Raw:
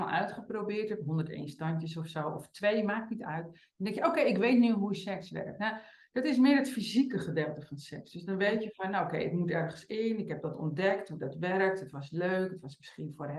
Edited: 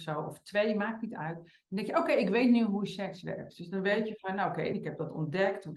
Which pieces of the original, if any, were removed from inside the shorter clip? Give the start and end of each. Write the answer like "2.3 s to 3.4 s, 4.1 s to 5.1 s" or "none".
5.6 s to 8.0 s, 9.3 s to 10.2 s

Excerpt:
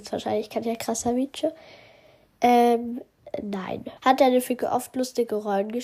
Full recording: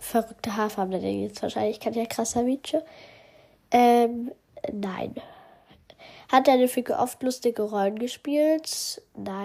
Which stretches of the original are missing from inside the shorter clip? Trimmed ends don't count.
5.3 s to 6.2 s

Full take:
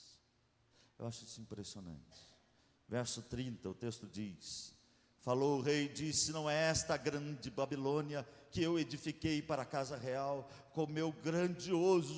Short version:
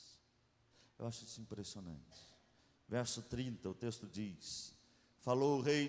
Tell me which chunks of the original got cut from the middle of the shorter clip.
none

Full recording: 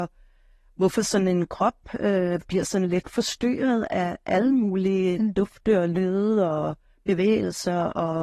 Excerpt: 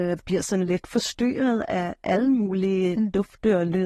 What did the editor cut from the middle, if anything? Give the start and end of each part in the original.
none

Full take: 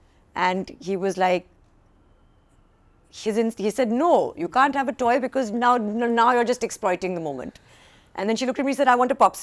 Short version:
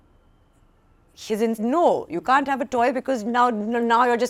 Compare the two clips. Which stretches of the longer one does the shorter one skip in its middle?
3.5 s to 3.9 s

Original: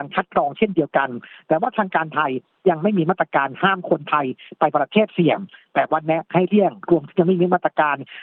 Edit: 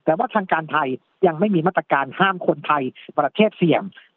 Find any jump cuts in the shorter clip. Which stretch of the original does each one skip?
4.6 s to 4.7 s

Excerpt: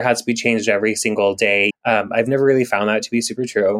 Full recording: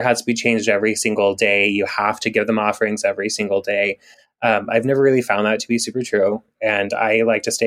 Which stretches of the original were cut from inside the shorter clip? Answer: 1.7 s to 4.3 s

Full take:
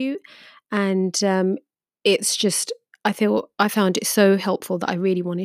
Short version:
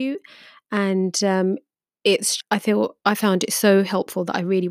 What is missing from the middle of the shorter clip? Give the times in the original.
2.4 s to 2.9 s

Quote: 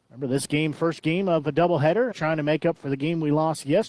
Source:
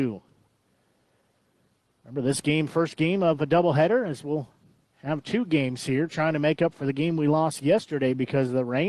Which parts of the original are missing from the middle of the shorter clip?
4.1 s to 6.1 s

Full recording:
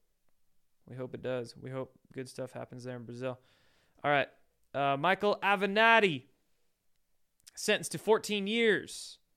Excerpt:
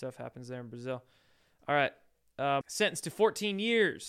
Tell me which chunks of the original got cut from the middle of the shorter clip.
5.0 s to 7.5 s

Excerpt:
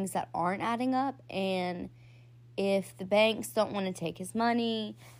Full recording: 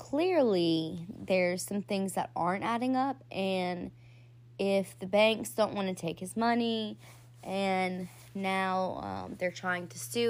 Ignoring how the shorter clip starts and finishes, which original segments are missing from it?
none

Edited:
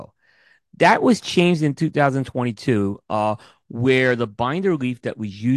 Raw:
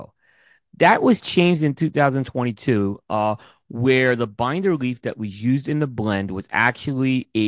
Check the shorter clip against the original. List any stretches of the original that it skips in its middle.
none

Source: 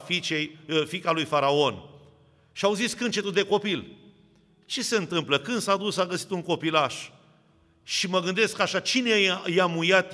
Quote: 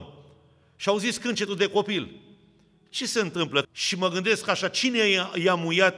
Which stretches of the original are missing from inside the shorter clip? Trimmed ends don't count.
5.4 s to 7.8 s

